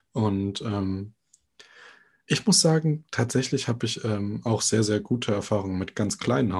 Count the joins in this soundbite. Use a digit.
0